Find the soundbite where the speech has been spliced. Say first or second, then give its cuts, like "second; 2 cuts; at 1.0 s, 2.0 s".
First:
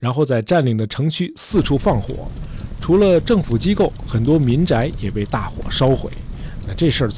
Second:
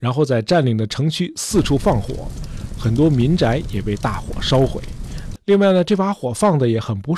second; 2 cuts; at 2.8 s, 5.4 s